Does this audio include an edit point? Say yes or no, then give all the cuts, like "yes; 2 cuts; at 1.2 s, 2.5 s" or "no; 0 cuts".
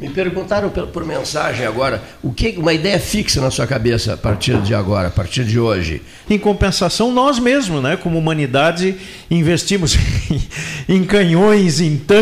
yes; 1 cut; at 6.3 s